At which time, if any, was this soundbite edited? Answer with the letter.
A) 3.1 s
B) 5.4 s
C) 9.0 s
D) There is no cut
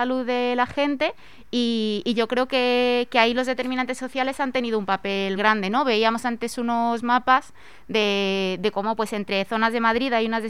B